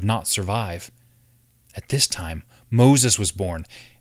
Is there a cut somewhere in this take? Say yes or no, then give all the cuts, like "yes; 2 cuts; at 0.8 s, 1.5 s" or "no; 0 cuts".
no; 0 cuts